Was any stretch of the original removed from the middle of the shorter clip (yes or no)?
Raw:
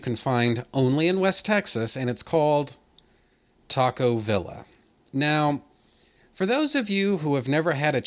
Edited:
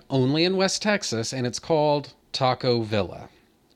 yes